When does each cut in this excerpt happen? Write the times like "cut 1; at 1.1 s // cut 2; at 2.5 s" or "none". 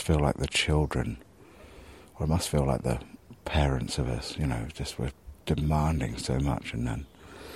none